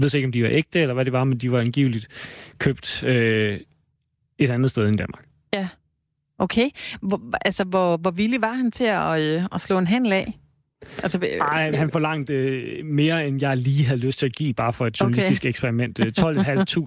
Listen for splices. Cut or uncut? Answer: cut